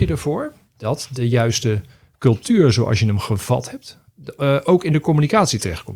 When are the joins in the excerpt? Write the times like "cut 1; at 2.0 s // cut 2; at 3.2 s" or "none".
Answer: none